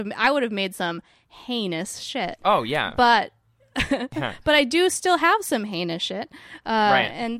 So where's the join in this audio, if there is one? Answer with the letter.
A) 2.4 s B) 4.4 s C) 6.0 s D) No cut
D